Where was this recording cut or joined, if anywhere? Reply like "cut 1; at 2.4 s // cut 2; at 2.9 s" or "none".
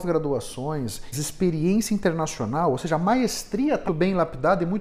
cut 1; at 1.1 s // cut 2; at 3.9 s